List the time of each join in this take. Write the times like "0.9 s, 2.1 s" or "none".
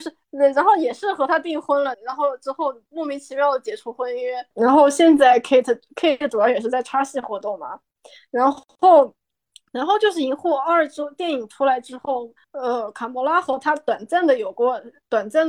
1.9 s